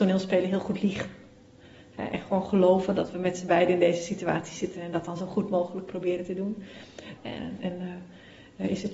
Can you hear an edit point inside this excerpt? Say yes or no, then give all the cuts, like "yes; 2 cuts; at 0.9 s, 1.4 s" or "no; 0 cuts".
yes; 1 cut; at 7.2 s